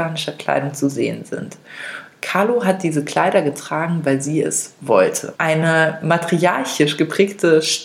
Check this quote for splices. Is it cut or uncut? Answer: cut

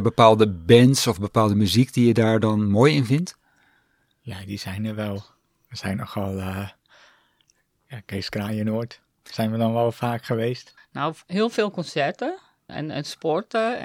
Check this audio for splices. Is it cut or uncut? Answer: cut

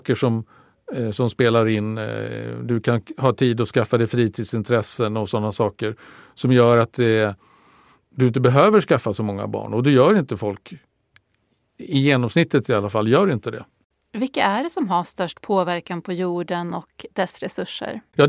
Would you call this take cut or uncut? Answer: uncut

